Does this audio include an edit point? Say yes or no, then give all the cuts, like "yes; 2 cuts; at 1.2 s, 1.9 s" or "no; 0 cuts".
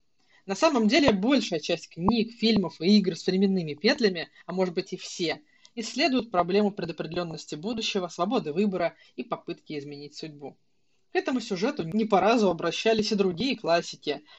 no; 0 cuts